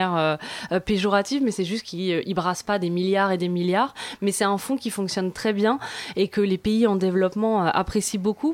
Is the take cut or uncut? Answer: uncut